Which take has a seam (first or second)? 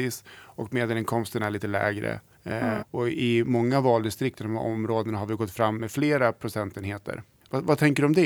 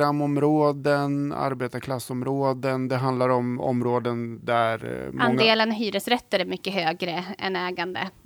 first